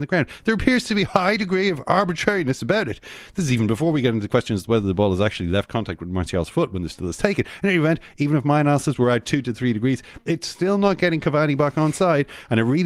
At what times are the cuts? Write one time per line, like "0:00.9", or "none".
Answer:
none